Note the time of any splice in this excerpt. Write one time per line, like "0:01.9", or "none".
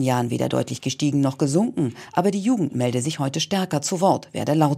none